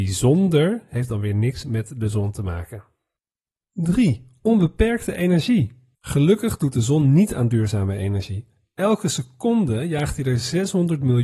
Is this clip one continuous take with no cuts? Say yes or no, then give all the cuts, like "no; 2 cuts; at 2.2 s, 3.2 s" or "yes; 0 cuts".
yes; 0 cuts